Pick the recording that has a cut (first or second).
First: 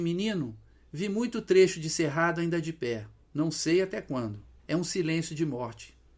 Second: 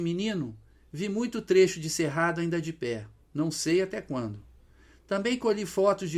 first